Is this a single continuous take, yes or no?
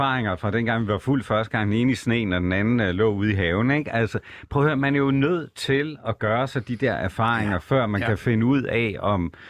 yes